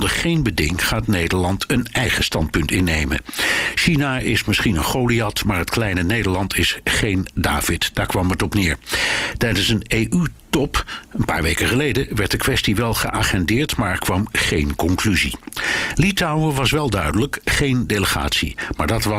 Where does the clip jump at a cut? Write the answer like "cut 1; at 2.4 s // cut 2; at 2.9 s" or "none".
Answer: none